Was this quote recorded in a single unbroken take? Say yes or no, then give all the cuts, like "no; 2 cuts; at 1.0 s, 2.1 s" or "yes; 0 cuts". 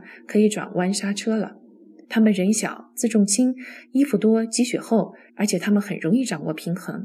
no; 2 cuts; at 2.0 s, 5.3 s